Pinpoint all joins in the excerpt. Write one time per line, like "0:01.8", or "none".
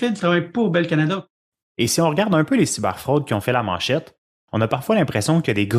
0:01.6